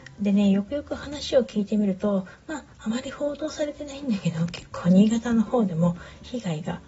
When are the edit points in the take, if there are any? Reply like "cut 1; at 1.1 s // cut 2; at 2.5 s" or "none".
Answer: none

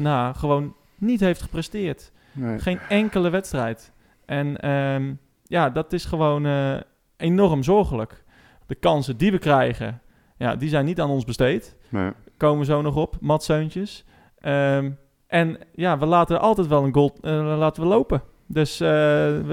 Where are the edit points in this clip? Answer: cut 1; at 8.6 s

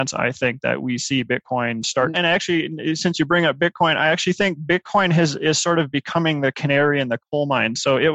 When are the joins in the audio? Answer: cut 1; at 2.1 s

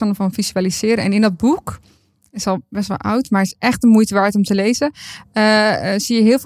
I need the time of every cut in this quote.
none

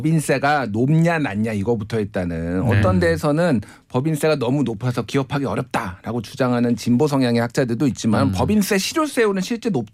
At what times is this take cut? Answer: none

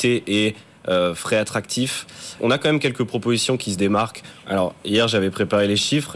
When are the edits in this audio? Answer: cut 1; at 2.4 s // cut 2; at 4.4 s

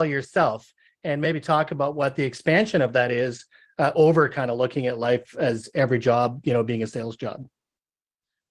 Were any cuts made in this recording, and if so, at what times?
none

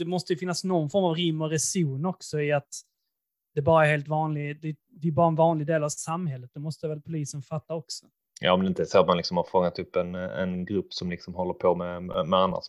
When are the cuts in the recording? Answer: none

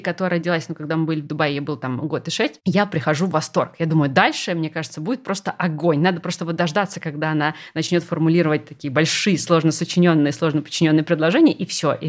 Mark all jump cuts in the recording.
none

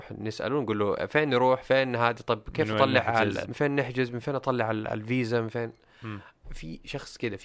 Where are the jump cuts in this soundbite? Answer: cut 1; at 3.5 s

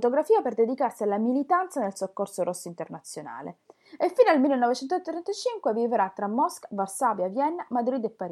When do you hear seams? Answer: none

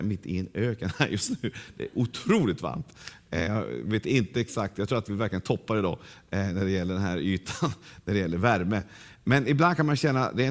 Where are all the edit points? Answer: none

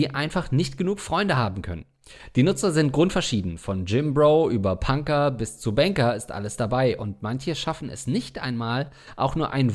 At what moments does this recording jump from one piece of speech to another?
none

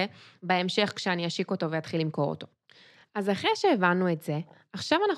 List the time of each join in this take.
none

